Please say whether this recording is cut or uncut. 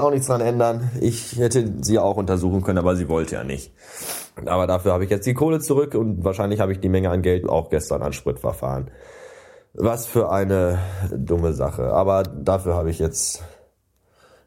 cut